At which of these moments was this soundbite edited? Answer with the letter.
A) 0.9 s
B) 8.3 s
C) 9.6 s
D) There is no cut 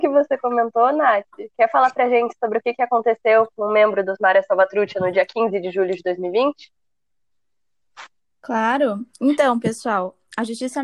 D